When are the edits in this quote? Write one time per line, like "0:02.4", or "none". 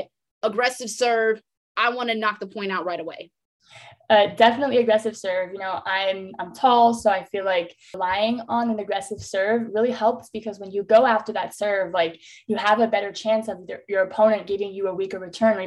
none